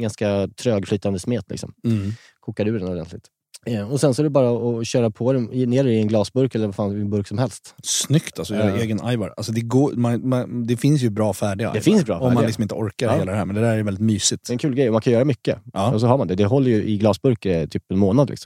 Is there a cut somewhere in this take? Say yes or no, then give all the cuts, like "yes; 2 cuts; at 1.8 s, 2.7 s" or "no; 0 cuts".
no; 0 cuts